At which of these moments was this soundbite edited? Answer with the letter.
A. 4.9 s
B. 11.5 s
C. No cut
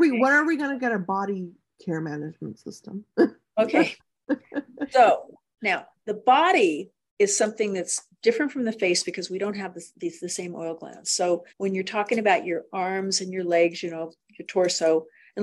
B